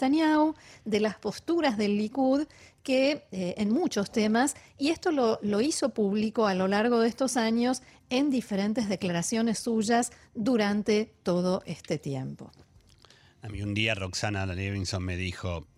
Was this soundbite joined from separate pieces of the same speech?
no; 0 cuts

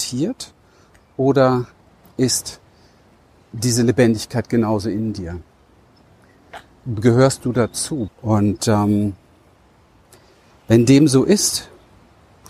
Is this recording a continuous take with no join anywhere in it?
no; 1 cut; at 8.1 s

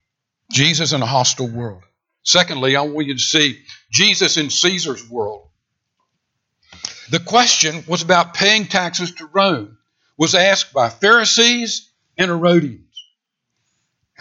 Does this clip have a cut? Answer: yes; 1 cut; at 7.0 s

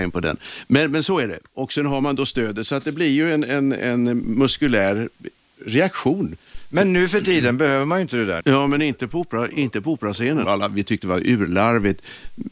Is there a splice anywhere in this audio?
yes; 2 cuts; at 8.4 s, 10.5 s

